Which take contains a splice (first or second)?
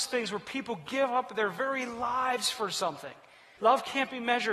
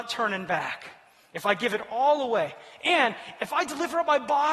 first